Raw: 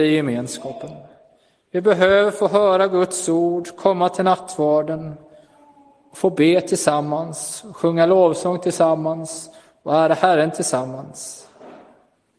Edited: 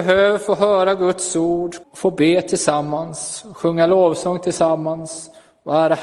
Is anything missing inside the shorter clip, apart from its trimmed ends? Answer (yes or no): yes